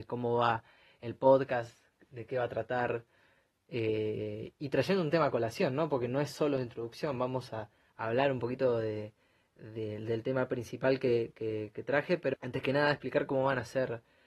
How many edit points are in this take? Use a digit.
1